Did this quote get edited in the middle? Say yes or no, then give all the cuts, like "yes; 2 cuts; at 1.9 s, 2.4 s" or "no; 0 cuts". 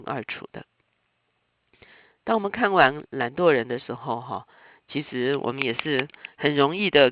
no; 0 cuts